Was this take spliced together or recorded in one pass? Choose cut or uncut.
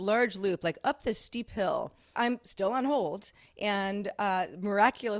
cut